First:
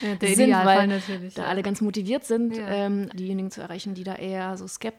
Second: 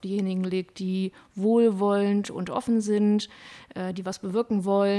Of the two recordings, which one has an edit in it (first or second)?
first